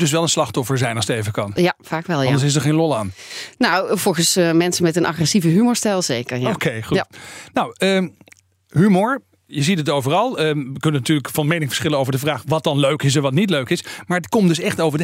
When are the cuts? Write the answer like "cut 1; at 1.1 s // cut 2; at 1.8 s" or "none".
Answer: none